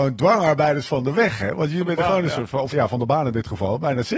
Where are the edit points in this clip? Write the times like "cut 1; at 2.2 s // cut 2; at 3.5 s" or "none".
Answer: cut 1; at 2.7 s